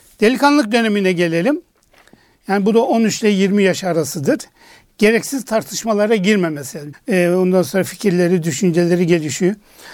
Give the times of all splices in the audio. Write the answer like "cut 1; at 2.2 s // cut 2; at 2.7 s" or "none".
cut 1; at 6.9 s